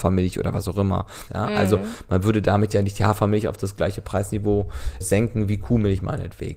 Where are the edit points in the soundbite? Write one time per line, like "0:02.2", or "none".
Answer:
0:01.3
0:05.0

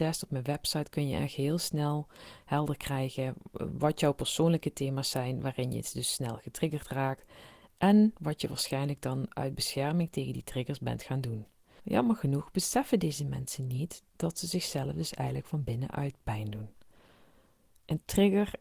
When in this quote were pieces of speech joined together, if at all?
0:11.8

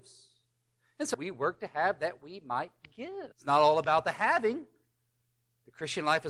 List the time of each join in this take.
0:01.1
0:03.3

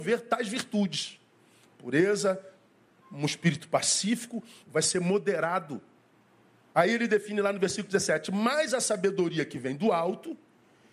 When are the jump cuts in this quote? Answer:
0:04.6
0:06.7

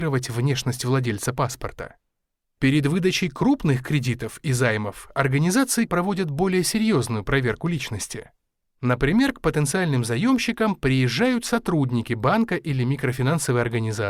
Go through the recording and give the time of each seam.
0:05.9

